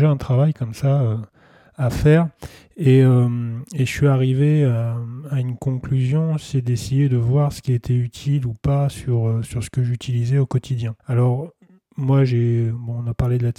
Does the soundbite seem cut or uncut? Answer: cut